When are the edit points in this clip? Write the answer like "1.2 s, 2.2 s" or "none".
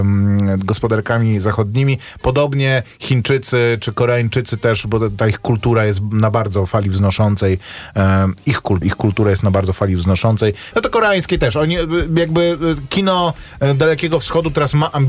8.8 s, 10.7 s